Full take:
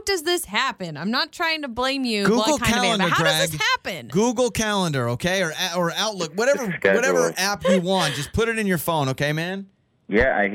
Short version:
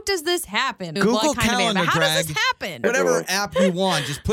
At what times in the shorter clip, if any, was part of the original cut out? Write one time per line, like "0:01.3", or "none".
0:01.0
0:02.8